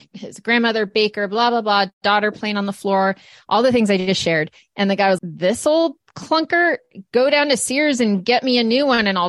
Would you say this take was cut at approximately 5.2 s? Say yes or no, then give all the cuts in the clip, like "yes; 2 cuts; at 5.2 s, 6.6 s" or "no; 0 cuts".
yes; 1 cut; at 5.2 s